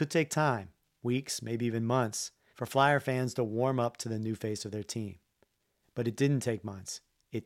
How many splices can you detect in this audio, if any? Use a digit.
1